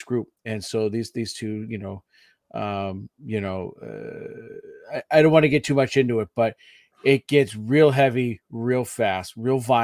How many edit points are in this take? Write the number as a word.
zero